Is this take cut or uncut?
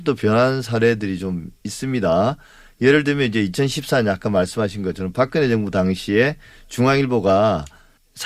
uncut